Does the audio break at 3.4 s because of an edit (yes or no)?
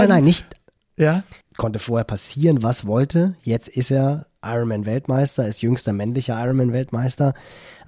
no